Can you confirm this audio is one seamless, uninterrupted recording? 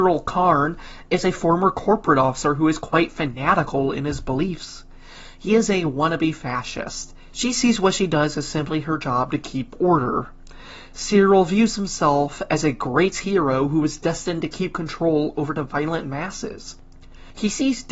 no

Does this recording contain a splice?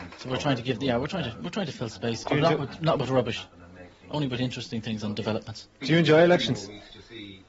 yes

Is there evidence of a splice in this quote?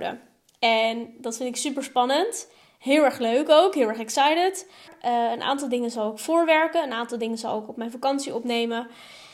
yes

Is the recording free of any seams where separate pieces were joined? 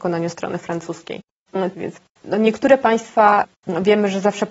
no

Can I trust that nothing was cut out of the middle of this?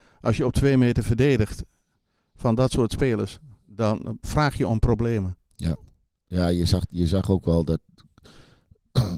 yes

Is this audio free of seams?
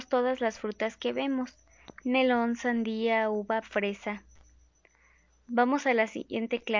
no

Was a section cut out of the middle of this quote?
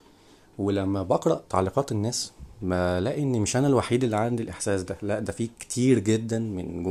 yes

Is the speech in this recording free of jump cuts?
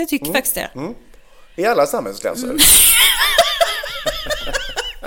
yes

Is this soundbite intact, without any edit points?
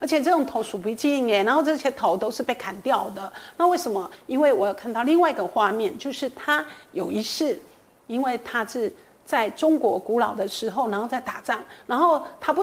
yes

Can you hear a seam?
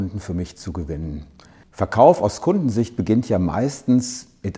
yes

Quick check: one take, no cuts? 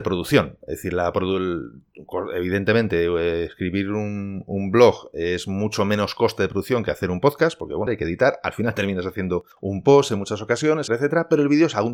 no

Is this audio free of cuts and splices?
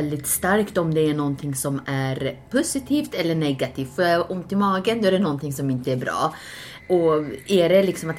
yes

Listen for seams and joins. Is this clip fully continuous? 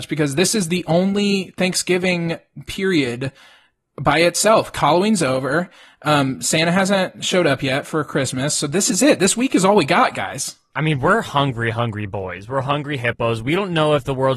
yes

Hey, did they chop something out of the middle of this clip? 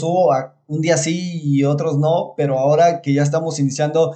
no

